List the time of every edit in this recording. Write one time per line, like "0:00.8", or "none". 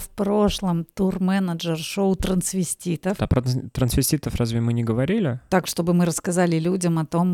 0:03.2